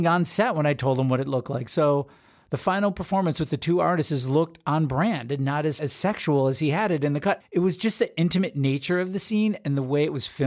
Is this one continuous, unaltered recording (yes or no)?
no